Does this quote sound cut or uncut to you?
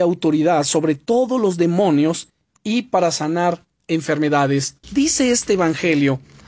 cut